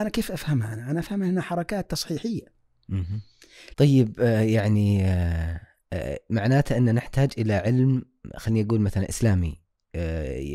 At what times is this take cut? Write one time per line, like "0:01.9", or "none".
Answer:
0:03.7